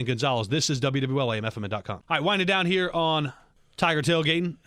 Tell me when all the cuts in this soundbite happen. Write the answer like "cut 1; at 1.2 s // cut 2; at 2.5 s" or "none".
none